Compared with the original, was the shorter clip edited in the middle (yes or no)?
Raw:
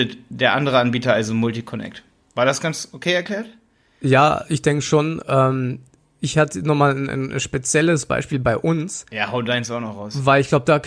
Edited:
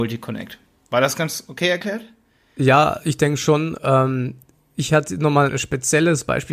yes